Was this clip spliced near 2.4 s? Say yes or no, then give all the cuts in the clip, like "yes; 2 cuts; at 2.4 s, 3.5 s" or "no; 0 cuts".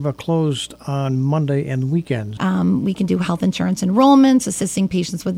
yes; 1 cut; at 2.4 s